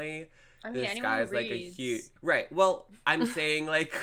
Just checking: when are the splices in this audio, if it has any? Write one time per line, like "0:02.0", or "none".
0:02.2